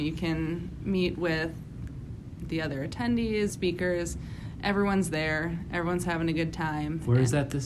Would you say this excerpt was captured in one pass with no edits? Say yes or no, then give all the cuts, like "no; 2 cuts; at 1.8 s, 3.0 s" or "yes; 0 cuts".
no; 1 cut; at 3.5 s